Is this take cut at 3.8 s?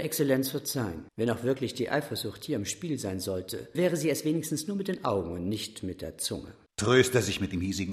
yes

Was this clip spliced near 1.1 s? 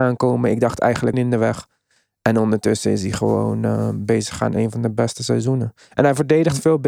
yes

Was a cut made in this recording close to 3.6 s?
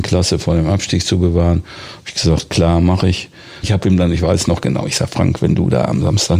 yes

